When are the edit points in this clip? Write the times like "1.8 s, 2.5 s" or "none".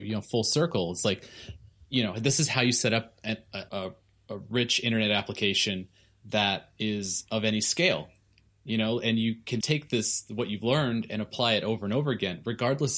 3.7 s, 9.6 s